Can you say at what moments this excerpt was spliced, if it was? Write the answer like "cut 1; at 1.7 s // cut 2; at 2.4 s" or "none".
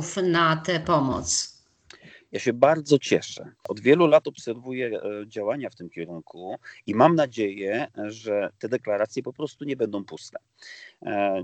none